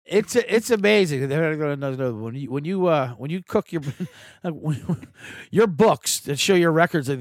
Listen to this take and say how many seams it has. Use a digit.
0